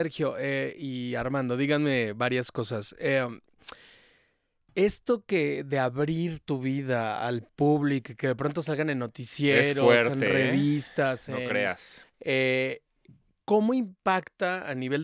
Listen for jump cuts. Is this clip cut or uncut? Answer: uncut